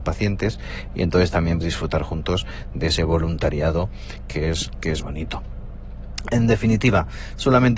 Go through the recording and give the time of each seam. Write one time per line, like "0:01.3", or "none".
0:01.6
0:05.0